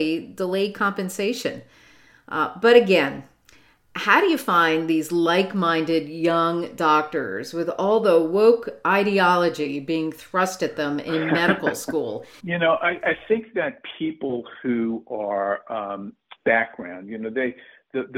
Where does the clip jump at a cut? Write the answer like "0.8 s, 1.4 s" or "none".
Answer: 12.4 s, 16.3 s